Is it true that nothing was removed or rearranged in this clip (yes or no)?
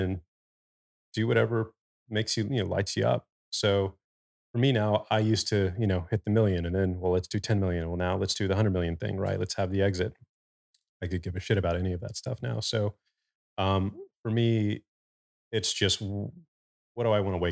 yes